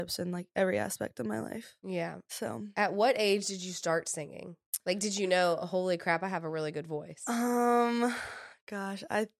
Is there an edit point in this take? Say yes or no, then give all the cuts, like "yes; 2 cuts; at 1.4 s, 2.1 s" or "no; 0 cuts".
no; 0 cuts